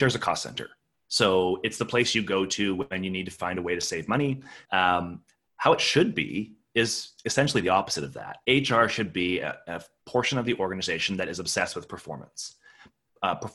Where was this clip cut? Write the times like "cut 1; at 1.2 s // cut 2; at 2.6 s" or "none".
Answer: cut 1; at 4.6 s